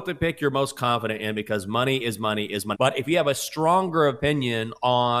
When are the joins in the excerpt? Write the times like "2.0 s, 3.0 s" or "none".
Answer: 2.7 s